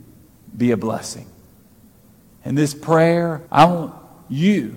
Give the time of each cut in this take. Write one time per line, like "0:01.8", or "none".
0:02.3
0:03.5